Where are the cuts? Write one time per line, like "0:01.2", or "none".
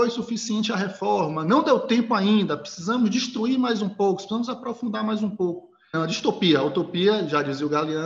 0:05.9

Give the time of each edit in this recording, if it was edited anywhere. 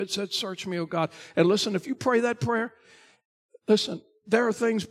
none

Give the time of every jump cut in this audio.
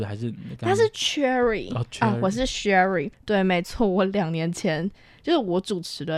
0:03.1

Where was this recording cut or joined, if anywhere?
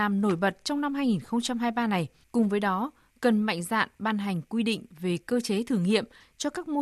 0:02.2

